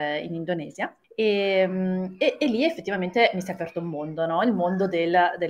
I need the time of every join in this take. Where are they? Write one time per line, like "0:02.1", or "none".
0:01.0

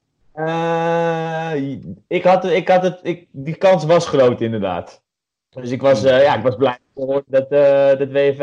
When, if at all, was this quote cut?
none

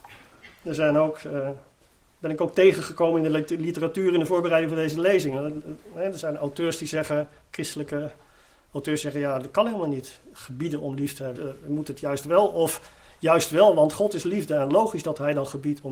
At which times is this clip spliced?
0:11.4

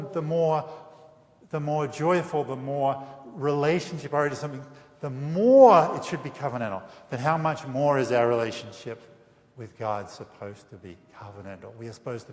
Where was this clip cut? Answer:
none

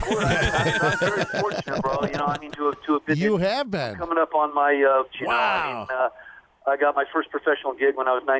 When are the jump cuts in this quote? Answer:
0:05.1

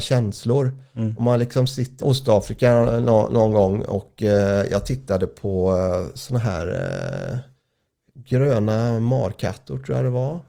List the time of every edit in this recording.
0:02.0

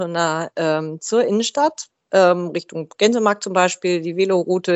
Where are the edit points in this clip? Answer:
none

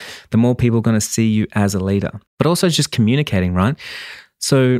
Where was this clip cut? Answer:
0:02.3

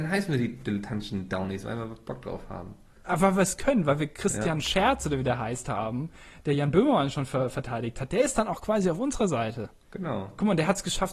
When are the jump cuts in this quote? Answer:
none

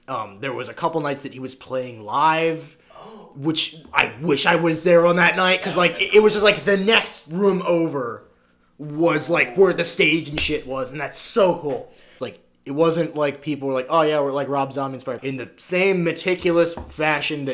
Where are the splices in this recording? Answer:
0:12.2
0:15.2

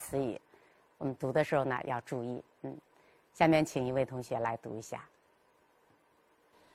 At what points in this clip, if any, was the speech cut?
none

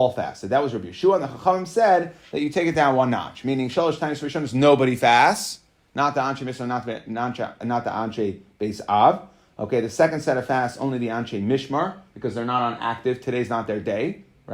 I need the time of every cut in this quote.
none

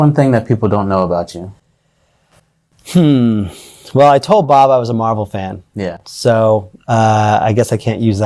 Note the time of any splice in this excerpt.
none

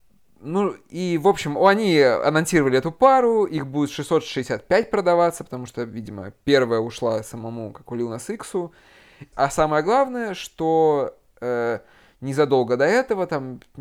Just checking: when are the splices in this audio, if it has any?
0:09.3

